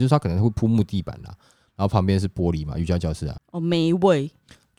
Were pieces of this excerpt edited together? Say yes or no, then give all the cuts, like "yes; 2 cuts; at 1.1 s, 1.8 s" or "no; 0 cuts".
yes; 1 cut; at 3.4 s